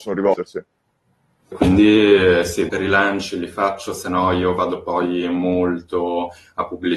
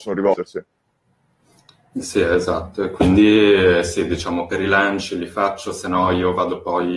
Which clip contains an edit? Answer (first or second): first